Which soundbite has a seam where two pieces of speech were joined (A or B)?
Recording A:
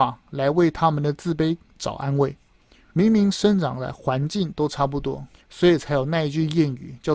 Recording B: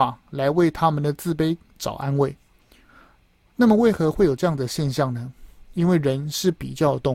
A